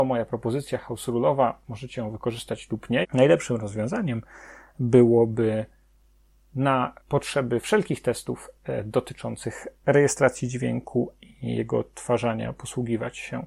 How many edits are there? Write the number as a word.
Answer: two